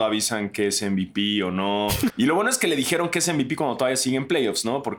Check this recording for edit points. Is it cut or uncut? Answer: cut